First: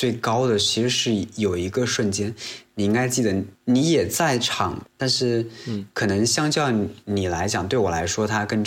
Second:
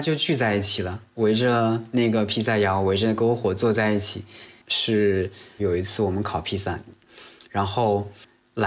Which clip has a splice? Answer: second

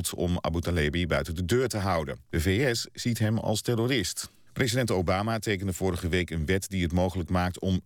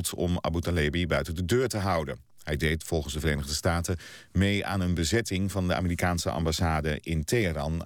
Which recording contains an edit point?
first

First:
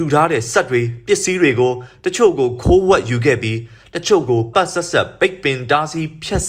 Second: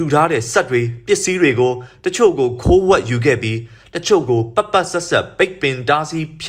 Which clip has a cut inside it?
first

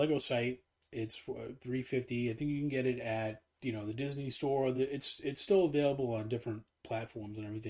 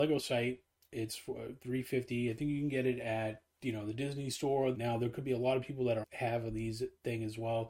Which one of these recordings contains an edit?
second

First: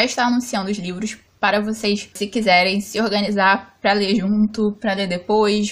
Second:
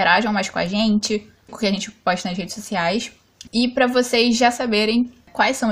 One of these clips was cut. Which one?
second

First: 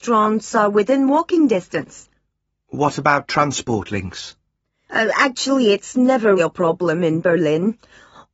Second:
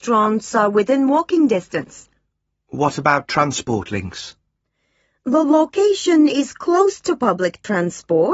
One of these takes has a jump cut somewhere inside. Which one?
first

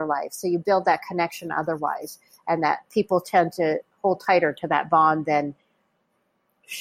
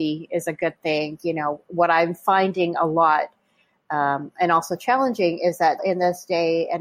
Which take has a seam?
second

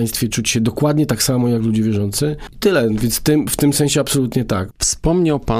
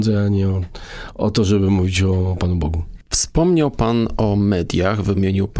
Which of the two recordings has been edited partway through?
first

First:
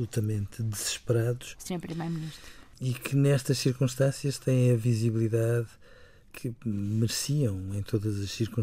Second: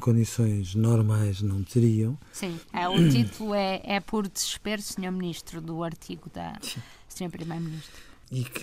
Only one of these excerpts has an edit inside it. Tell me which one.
first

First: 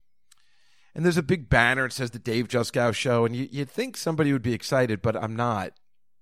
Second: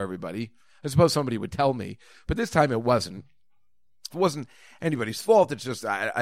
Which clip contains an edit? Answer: second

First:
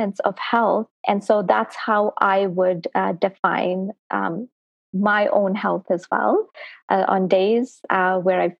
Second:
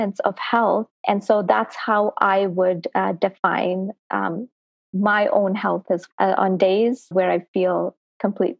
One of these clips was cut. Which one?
second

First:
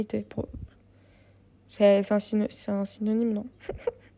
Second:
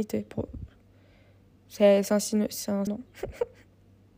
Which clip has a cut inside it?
second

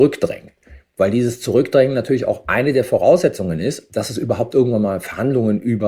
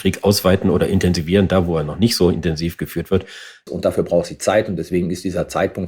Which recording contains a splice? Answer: second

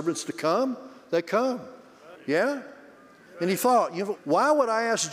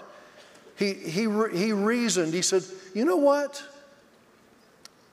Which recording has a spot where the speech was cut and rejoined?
first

